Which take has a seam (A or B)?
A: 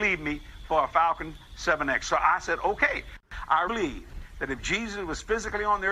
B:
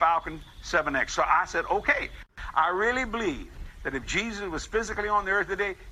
A